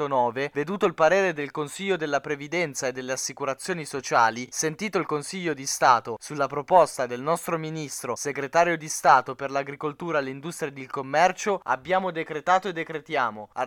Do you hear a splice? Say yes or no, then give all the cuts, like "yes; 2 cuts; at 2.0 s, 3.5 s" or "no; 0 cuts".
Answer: no; 0 cuts